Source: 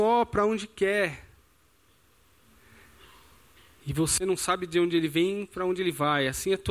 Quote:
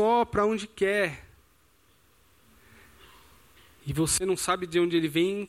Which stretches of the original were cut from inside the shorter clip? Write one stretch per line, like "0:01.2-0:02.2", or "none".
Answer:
none